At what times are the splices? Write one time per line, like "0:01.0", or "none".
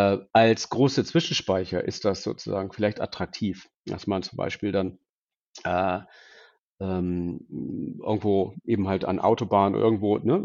none